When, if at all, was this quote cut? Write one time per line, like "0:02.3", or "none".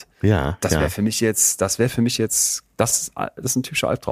none